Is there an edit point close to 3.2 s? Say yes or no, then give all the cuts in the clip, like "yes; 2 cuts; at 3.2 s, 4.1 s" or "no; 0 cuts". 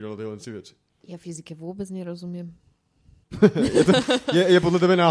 yes; 1 cut; at 3.2 s